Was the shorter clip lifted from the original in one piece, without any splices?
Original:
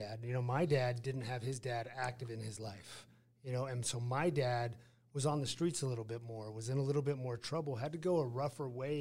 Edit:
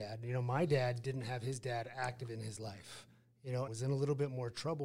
no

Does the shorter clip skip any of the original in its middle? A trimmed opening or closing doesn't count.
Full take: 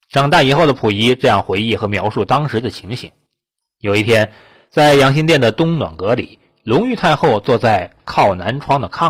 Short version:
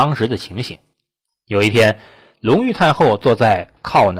yes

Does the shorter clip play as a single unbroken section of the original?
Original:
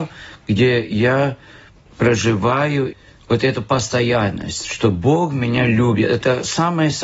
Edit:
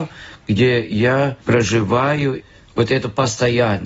no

